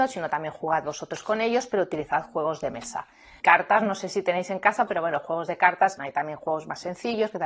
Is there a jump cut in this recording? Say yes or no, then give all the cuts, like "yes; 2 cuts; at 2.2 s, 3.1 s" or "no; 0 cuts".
yes; 3 cuts; at 3.4 s, 4.9 s, 6.0 s